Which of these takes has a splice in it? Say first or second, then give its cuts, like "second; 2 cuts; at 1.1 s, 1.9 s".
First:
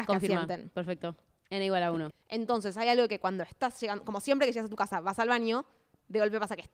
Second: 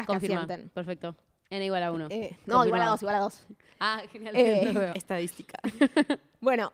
first; 1 cut; at 2.1 s